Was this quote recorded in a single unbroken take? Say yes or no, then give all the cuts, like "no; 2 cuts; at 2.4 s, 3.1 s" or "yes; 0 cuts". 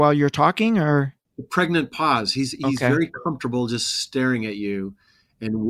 yes; 0 cuts